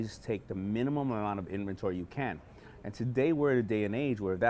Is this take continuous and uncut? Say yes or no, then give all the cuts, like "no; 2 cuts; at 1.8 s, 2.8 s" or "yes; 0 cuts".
yes; 0 cuts